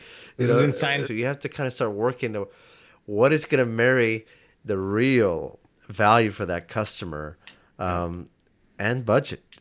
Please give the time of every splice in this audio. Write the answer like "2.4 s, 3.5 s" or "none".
1.0 s